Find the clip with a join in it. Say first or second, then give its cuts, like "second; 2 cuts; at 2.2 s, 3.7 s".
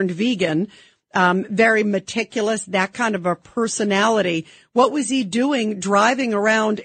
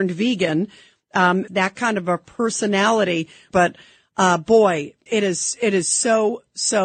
second; 3 cuts; at 1.5 s, 3.5 s, 5.1 s